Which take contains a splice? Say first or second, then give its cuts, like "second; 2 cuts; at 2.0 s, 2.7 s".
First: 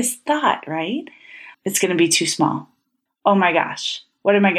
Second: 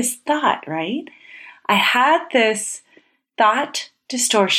first; 2 cuts; at 1.5 s, 3.1 s